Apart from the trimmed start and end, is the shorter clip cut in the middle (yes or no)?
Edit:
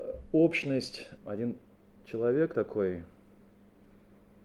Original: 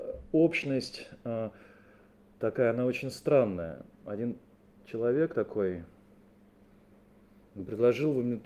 yes